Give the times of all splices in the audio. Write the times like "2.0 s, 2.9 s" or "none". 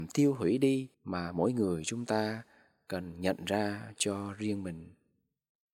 0.9 s

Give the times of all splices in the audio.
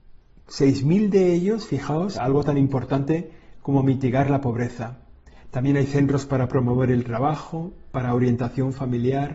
2.1 s

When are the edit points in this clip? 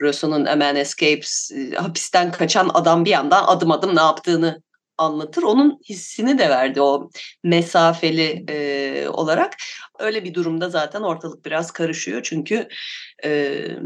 9.9 s

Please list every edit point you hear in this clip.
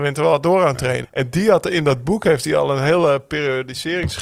1.0 s

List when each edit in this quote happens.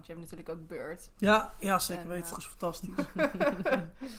1.1 s, 2.3 s

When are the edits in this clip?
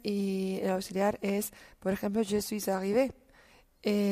none

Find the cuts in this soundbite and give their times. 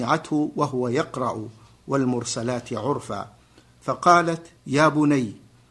4.6 s

